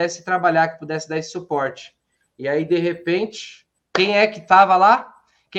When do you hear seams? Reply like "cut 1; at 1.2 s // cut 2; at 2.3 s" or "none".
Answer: none